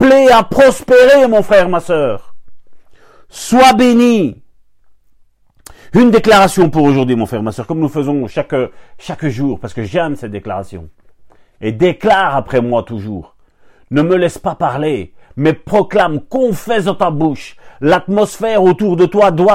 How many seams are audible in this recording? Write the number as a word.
zero